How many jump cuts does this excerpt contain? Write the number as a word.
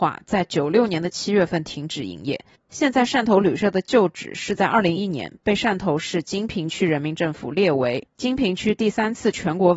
one